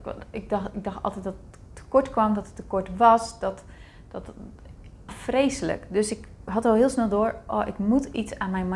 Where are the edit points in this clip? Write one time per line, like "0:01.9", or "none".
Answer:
0:05.1